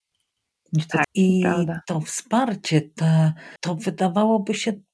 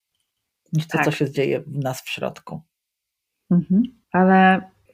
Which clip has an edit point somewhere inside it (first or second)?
first